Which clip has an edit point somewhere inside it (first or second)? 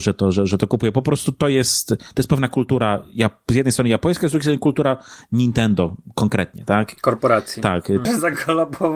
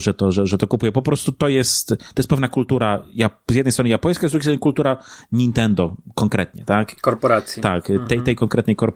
first